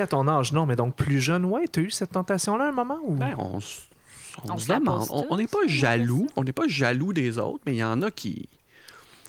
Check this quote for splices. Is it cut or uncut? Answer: uncut